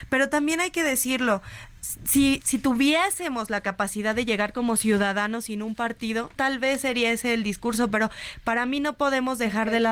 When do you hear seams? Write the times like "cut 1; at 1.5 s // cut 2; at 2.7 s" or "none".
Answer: cut 1; at 2.4 s // cut 2; at 6.4 s

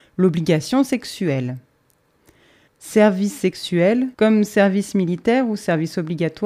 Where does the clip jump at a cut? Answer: cut 1; at 2.7 s // cut 2; at 4.1 s

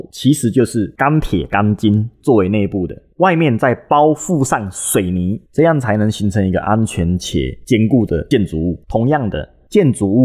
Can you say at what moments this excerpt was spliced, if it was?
cut 1; at 8.8 s

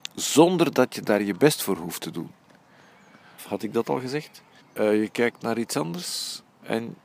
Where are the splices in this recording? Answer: cut 1; at 3.4 s // cut 2; at 4.6 s

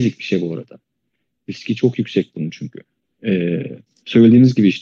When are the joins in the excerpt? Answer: none

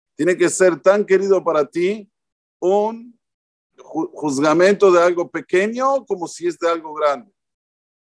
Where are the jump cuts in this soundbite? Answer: cut 1; at 3.8 s

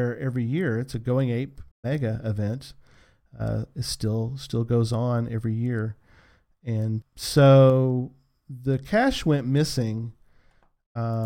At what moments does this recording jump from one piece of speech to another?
cut 1; at 1.7 s // cut 2; at 7.0 s

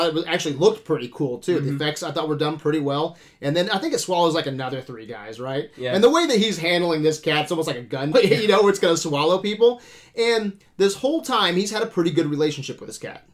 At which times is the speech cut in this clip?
cut 1; at 8.1 s

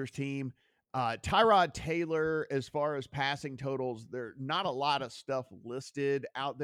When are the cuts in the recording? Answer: none

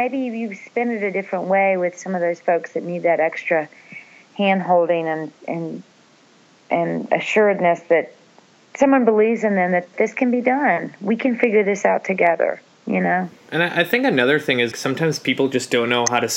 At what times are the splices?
cut 1; at 13.3 s // cut 2; at 14.7 s

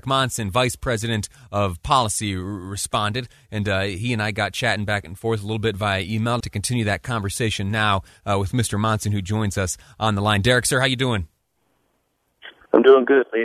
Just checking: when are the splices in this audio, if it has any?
cut 1; at 6.4 s

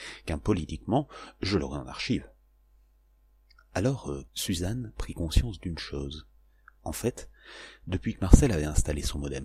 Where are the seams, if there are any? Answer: cut 1; at 4.3 s

